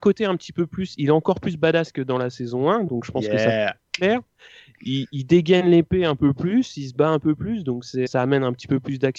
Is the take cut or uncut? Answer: cut